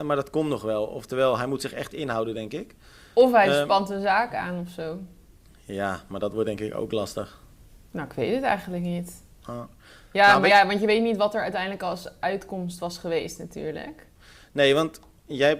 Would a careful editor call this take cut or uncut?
uncut